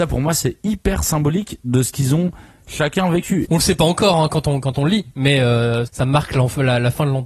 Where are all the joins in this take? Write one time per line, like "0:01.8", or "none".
0:03.4
0:05.9